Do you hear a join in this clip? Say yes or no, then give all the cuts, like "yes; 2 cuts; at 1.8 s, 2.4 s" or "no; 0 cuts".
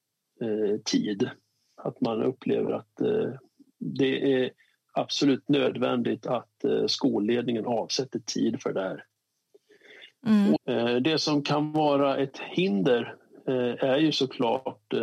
yes; 1 cut; at 10.6 s